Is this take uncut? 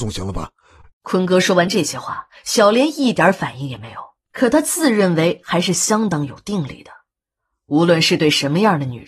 no; 2 cuts; at 0.9 s, 4.2 s

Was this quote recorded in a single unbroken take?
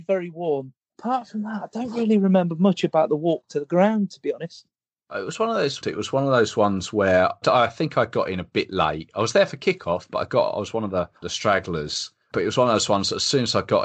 no; 3 cuts; at 5.8 s, 7.4 s, 11.2 s

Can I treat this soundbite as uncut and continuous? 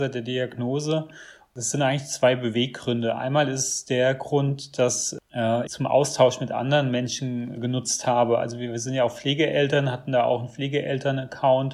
no; 2 cuts; at 5.7 s, 7.6 s

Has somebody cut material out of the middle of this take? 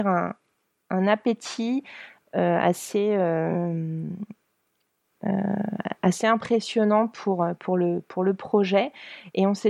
no; 0 cuts

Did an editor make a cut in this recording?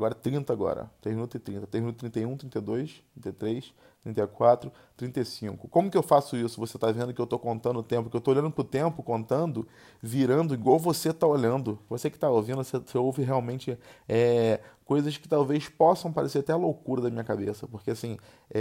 yes; 1 cut; at 11.9 s

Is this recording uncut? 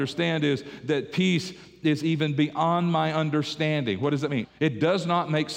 no; 1 cut; at 4.4 s

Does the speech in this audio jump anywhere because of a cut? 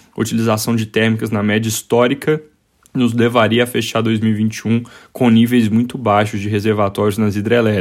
no; 0 cuts

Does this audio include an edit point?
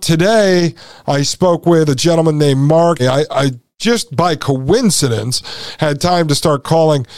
yes; 1 cut; at 3.0 s

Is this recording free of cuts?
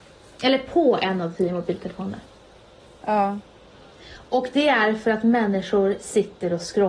yes; 0 cuts

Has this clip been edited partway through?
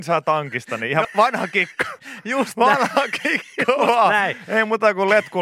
yes; 1 cut; at 1.0 s

